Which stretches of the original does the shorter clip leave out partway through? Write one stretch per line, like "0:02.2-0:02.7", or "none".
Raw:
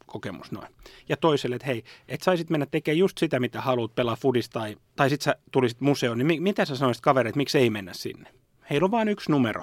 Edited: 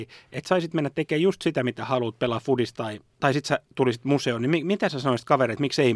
none